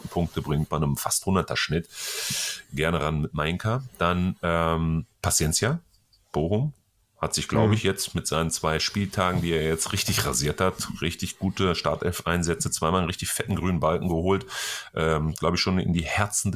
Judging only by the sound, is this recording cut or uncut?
cut